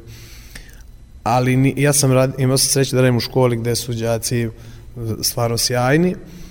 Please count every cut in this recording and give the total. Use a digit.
0